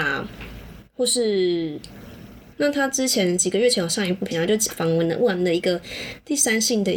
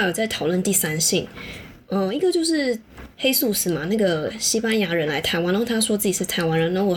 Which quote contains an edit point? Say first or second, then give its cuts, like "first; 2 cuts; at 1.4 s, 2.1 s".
first; 2 cuts; at 2.5 s, 4.3 s